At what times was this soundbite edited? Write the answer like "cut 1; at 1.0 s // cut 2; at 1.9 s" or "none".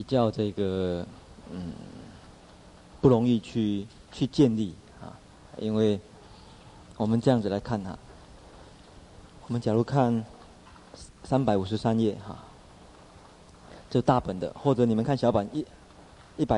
cut 1; at 5.5 s